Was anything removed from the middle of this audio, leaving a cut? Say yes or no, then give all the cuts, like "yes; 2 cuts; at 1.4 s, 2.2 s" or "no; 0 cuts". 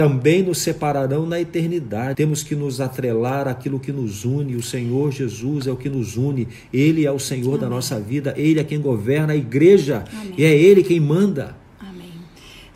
yes; 1 cut; at 2.1 s